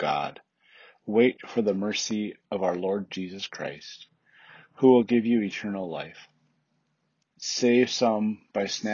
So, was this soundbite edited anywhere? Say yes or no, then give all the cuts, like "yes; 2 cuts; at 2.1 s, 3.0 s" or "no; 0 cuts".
yes; 1 cut; at 7.2 s